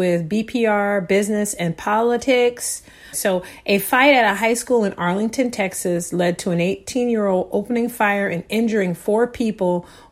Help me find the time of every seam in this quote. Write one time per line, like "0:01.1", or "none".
0:03.1